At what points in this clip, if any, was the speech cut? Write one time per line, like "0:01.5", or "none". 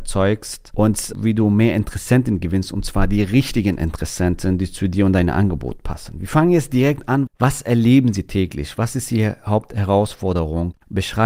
0:07.3